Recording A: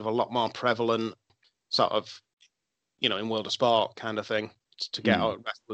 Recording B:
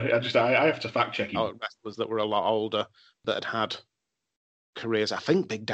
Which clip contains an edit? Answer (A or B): B